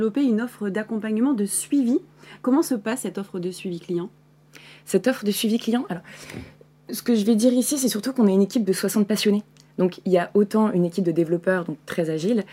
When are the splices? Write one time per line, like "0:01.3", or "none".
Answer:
none